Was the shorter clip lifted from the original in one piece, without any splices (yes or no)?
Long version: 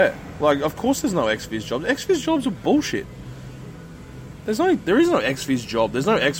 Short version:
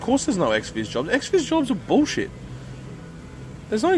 yes